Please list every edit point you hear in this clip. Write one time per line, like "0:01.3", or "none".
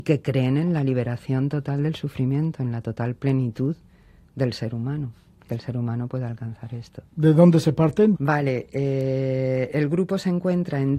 0:08.1